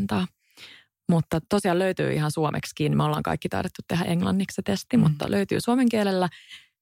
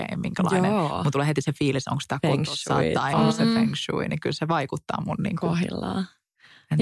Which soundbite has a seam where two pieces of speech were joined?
second; 1 cut; at 3.1 s

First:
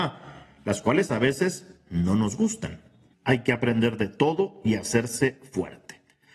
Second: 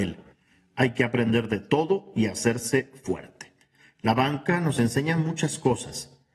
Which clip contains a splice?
first; 1 cut; at 3.1 s

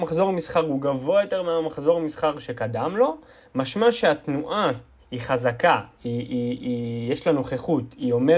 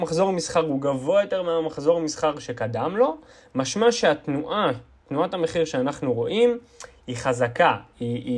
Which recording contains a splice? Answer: first; 1 cut; at 5.0 s

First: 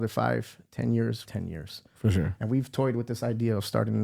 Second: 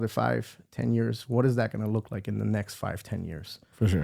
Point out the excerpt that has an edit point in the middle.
first; 1 cut; at 1.3 s

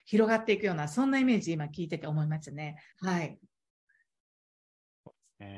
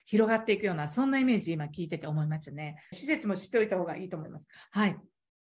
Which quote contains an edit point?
second; 1 cut; at 2.9 s

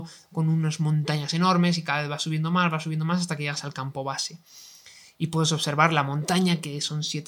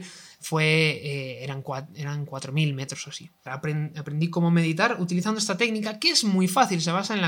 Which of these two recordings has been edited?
second; 1 cut; at 3.5 s

